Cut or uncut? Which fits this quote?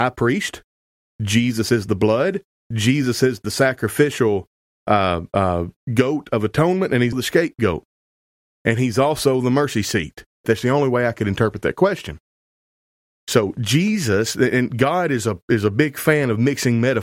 cut